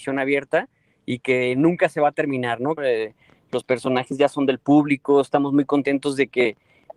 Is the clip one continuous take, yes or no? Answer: no